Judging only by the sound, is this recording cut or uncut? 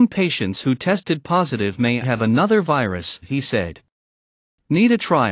cut